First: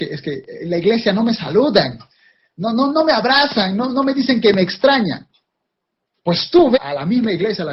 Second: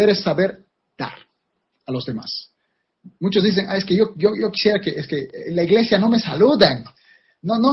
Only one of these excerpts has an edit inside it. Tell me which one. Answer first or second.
first